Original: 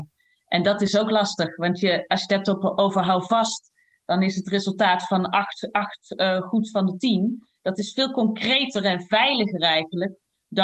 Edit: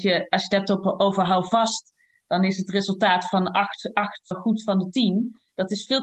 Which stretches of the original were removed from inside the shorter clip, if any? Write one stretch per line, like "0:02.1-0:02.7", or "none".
0:06.1-0:06.4